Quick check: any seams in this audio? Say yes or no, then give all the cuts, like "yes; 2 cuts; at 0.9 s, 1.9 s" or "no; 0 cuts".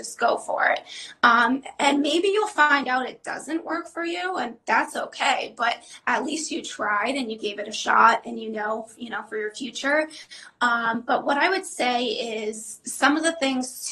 no; 0 cuts